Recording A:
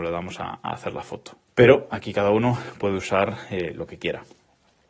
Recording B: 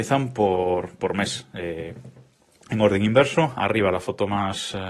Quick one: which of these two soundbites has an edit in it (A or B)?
A